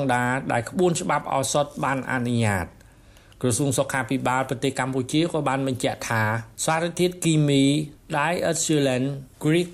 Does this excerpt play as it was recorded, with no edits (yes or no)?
no